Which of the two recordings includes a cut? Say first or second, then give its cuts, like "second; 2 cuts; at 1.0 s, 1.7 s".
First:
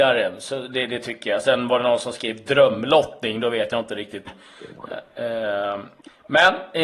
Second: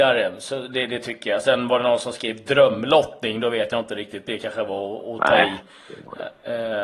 first; 1 cut; at 4.3 s